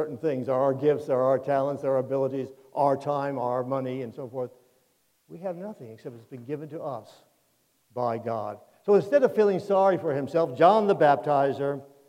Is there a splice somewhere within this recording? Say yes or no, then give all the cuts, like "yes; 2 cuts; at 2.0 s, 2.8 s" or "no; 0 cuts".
no; 0 cuts